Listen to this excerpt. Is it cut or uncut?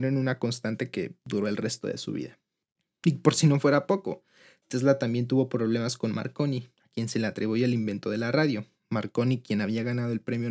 uncut